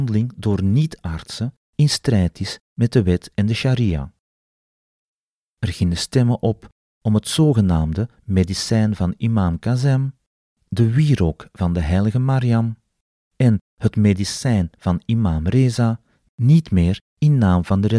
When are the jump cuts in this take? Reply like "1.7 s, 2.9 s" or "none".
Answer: none